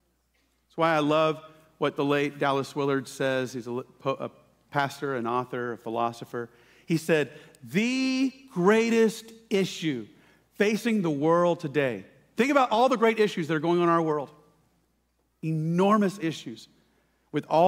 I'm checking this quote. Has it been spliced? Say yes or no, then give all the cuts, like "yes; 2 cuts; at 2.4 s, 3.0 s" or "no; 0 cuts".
no; 0 cuts